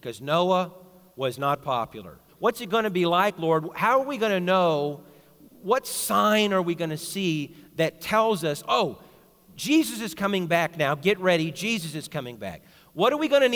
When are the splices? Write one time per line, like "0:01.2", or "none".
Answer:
0:02.3